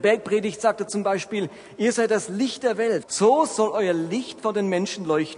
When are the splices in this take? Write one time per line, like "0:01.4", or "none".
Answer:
0:03.0